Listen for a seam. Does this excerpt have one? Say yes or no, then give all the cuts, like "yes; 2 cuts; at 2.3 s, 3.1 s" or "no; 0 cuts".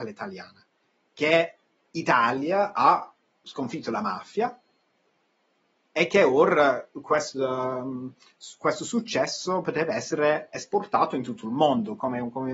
no; 0 cuts